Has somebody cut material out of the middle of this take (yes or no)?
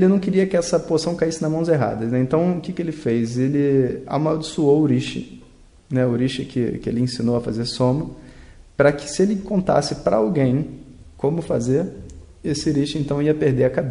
no